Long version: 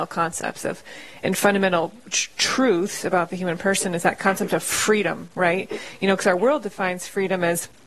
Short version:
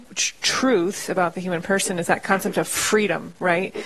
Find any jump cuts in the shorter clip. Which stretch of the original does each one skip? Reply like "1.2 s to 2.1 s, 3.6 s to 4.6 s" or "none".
none